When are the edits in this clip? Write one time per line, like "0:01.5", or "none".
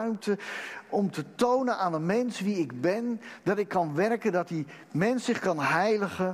none